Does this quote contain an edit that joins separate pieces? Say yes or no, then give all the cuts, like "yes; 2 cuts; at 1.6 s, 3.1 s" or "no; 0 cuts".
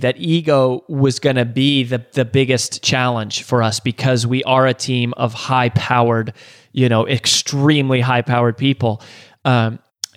no; 0 cuts